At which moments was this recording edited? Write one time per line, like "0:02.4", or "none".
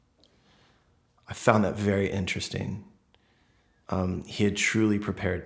0:03.8